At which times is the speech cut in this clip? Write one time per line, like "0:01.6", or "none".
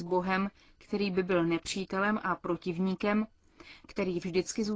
0:03.8